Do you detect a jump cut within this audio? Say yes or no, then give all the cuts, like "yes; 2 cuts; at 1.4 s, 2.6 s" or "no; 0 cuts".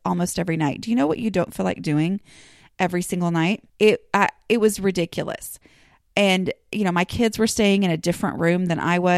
yes; 1 cut; at 3.7 s